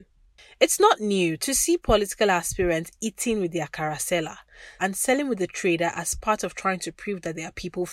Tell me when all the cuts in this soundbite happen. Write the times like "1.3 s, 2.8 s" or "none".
4.8 s